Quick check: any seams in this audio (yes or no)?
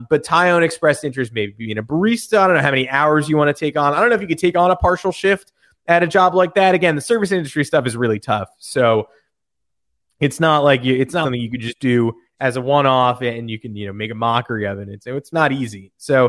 yes